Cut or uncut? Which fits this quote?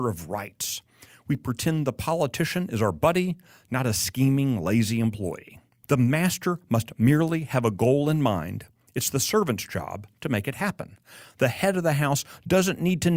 cut